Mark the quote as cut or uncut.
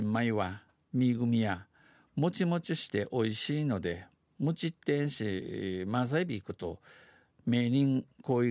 uncut